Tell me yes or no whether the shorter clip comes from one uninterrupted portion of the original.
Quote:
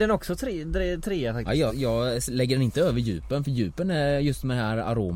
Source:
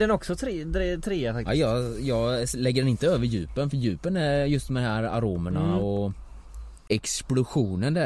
no